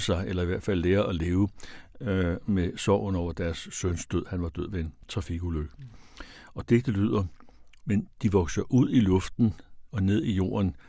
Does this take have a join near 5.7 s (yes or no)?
no